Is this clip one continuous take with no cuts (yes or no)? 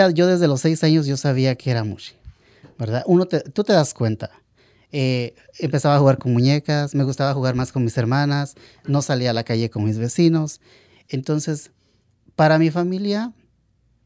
yes